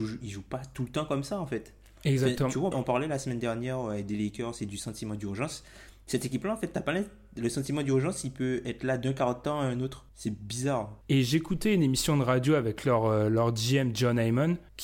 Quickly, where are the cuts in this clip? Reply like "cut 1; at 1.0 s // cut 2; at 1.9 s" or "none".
cut 1; at 2.7 s // cut 2; at 11.0 s